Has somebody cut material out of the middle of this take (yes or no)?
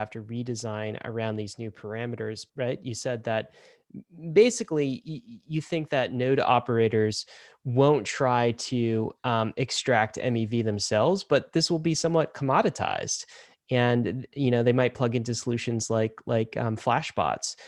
yes